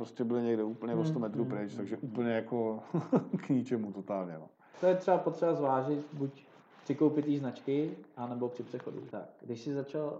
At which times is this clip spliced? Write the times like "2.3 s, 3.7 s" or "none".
4.7 s, 9.1 s

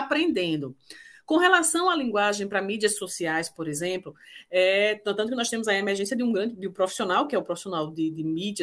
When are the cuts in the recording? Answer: none

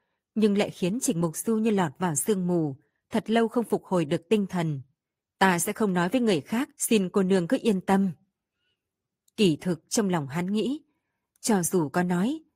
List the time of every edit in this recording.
5.2 s, 6.7 s

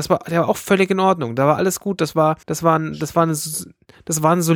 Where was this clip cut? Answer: 2.4 s

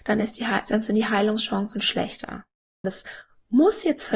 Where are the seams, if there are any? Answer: 2.8 s

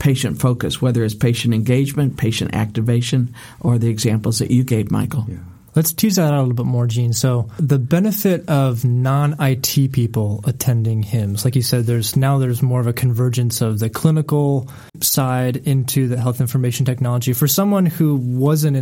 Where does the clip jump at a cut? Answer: 14.9 s

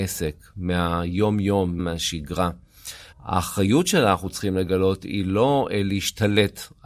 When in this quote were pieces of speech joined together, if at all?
1.8 s, 3.1 s

